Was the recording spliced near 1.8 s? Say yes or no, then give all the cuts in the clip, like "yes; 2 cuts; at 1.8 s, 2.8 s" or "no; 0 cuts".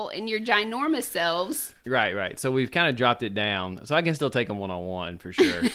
yes; 1 cut; at 1.8 s